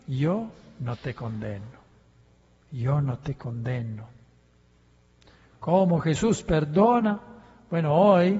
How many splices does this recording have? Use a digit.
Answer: 0